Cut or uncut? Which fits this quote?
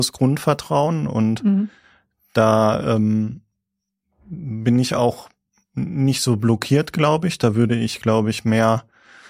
uncut